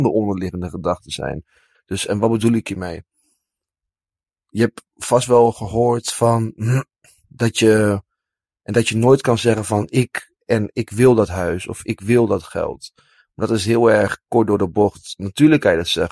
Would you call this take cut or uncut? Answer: cut